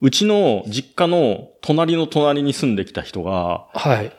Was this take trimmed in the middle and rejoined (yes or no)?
no